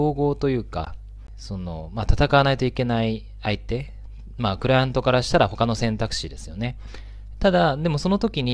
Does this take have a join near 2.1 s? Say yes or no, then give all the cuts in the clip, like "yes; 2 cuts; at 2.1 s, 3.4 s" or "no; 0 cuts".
no; 1 cut; at 7.3 s